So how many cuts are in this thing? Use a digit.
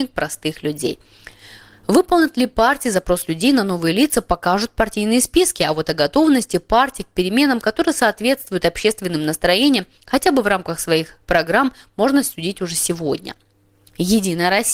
0